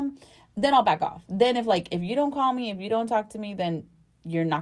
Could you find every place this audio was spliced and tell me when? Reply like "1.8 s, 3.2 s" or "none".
none